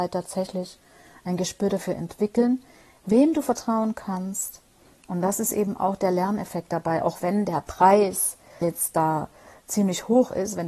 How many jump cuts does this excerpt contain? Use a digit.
1